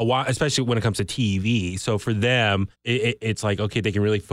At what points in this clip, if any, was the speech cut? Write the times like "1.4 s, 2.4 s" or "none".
2.8 s